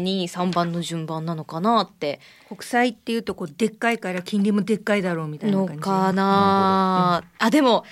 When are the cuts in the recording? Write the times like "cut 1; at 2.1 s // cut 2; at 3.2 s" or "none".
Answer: cut 1; at 6.1 s